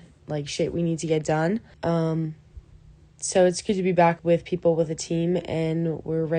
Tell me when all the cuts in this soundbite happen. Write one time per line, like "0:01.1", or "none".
0:01.7
0:04.2

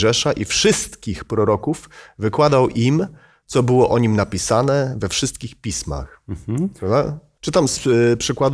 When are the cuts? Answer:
0:07.4

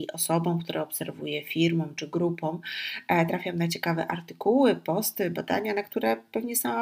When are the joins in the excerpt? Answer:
none

